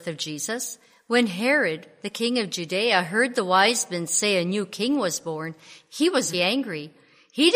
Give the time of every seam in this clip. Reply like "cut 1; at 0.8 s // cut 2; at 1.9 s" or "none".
cut 1; at 6.3 s